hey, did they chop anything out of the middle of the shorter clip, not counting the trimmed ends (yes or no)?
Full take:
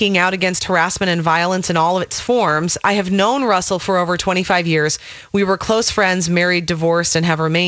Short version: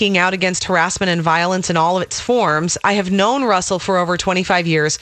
no